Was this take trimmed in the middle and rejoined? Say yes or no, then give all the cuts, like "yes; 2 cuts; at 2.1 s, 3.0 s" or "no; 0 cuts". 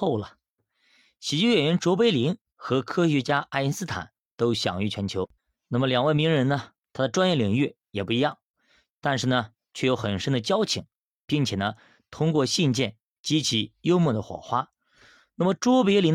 no; 0 cuts